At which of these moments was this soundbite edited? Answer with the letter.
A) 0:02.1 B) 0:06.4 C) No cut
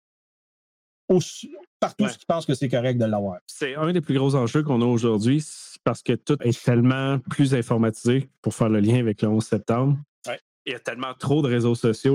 B